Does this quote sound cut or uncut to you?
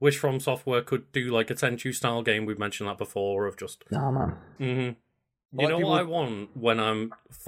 cut